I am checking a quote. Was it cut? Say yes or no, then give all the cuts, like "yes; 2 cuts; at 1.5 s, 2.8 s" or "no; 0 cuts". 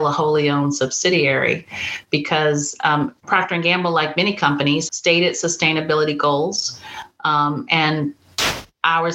yes; 2 cuts; at 3.2 s, 4.9 s